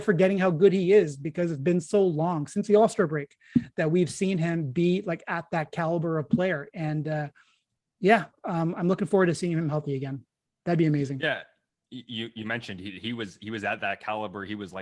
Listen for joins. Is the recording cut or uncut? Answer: uncut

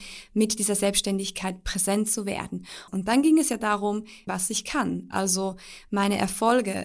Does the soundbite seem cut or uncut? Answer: cut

